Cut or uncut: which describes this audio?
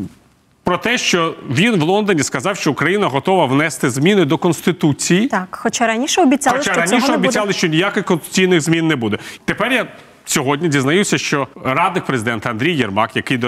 cut